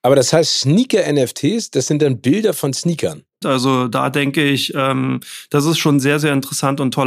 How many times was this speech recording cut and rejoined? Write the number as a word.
one